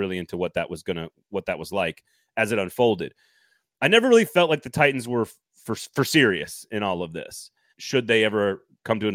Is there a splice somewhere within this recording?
yes; 1 cut; at 7.7 s

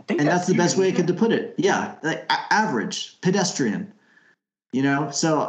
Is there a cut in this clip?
no; 0 cuts

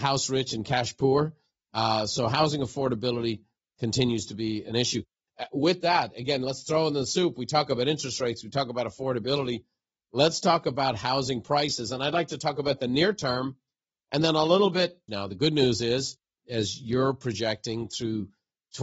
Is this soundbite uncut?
no; 2 cuts; at 15.1 s, 16.4 s

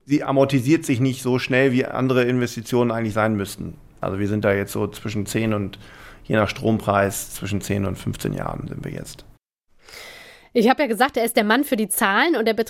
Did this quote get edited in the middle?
no; 0 cuts

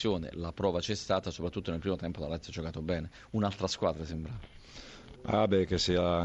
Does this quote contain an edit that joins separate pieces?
yes; 1 cut; at 5.1 s

